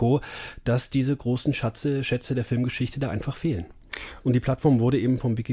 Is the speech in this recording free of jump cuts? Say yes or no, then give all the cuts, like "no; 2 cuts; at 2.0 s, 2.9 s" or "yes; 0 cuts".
no; 1 cut; at 4.2 s